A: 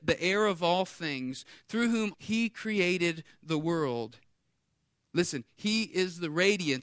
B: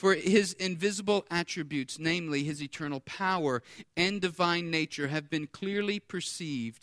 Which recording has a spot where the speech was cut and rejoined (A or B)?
A